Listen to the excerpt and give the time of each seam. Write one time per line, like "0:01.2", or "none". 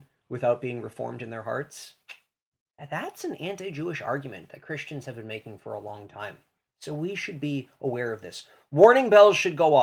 none